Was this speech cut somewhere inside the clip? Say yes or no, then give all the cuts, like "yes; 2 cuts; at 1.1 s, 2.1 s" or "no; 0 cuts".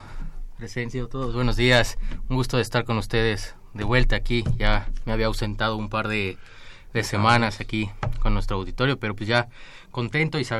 no; 0 cuts